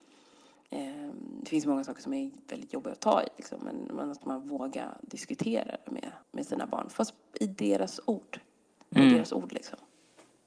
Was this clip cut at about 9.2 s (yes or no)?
no